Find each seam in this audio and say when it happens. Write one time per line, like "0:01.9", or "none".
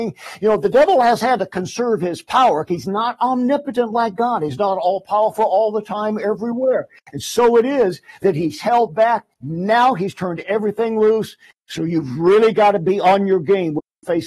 none